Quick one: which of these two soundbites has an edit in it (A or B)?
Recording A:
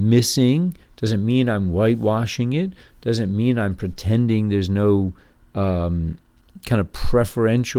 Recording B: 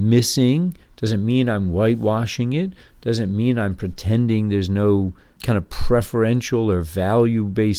B